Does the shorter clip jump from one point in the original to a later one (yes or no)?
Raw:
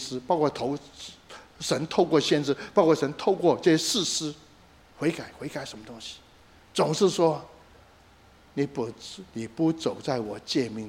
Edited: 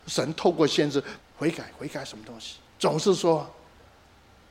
yes